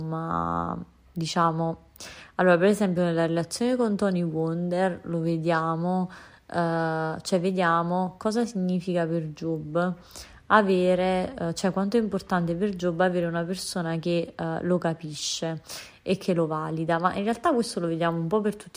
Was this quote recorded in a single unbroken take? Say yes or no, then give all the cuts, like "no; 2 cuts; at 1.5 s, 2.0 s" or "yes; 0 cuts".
yes; 0 cuts